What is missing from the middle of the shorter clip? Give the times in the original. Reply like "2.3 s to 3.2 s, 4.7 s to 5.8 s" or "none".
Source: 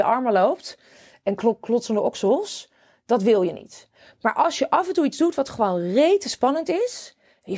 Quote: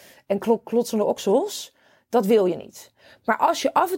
none